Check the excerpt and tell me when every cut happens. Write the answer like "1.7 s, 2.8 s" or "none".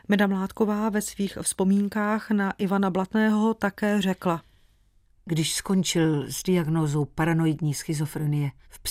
none